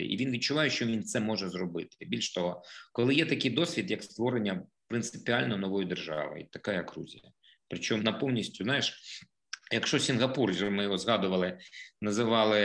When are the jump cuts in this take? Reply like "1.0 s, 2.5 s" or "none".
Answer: 8.0 s